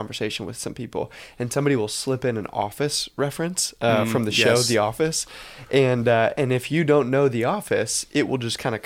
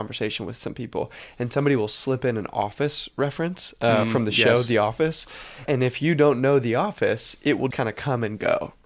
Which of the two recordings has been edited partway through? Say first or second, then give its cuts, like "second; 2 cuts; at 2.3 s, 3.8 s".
second; 2 cuts; at 5.7 s, 7.7 s